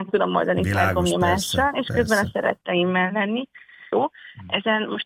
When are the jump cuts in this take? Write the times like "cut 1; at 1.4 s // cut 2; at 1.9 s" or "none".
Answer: cut 1; at 3.9 s